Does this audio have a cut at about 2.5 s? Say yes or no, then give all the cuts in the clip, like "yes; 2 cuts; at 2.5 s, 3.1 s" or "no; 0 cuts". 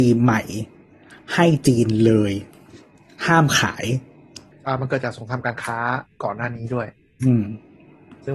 no; 0 cuts